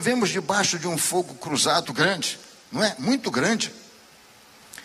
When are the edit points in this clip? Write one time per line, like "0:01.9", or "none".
0:01.8